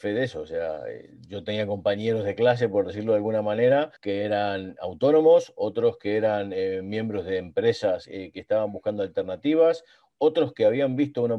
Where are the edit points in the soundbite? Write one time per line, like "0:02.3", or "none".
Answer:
0:04.0
0:10.1